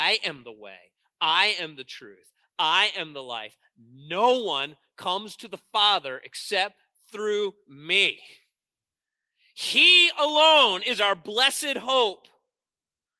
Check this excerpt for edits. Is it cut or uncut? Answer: uncut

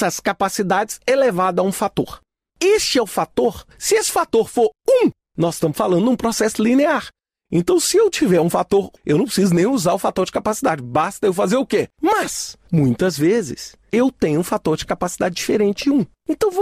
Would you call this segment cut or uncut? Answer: cut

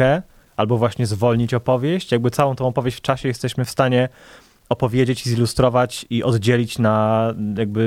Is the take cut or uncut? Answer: uncut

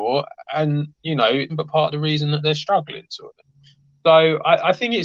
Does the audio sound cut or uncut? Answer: cut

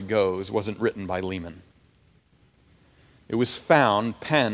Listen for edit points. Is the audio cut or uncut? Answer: uncut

